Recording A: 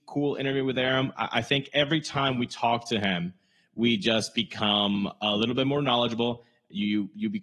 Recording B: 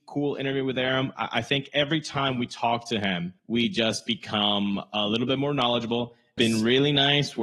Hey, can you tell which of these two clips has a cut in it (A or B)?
B